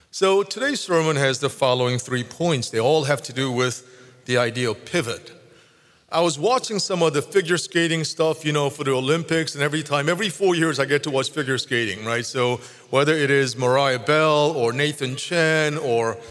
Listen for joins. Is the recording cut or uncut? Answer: uncut